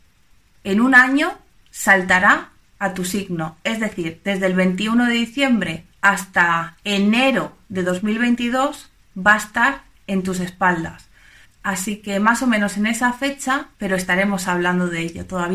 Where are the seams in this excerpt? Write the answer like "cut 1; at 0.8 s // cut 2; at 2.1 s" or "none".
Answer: cut 1; at 5.9 s // cut 2; at 11.5 s // cut 3; at 13.7 s